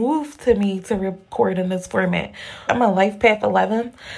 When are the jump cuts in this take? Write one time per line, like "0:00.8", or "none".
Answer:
0:02.7